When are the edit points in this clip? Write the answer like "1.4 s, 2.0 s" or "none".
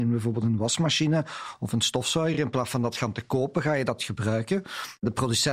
none